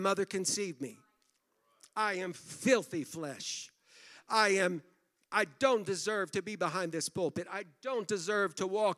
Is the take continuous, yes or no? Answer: yes